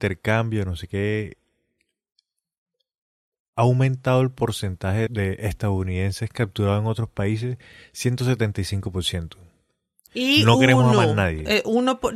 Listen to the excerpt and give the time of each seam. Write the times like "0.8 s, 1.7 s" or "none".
5.1 s, 10.1 s